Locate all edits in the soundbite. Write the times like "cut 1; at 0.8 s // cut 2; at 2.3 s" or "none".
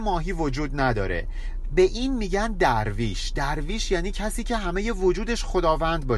none